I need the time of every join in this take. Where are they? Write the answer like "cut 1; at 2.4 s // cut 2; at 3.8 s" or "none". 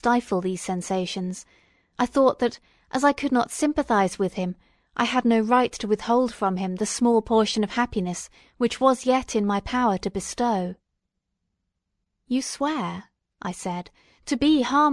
none